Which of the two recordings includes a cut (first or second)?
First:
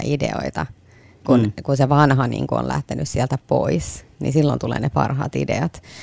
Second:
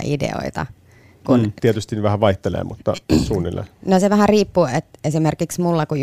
second